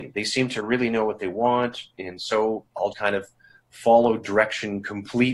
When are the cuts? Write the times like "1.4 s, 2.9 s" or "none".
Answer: 2.9 s